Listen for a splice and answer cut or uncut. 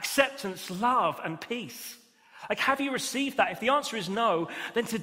uncut